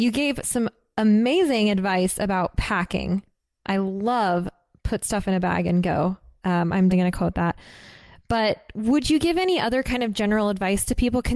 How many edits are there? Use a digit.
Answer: 1